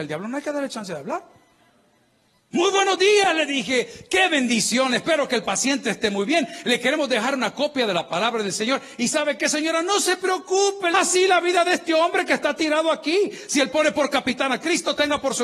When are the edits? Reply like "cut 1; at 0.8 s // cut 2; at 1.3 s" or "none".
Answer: cut 1; at 10.9 s